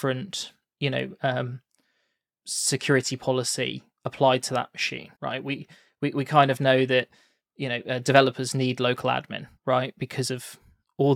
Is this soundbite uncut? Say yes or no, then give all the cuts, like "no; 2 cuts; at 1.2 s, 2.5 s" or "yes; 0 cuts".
no; 2 cuts; at 5.2 s, 9.6 s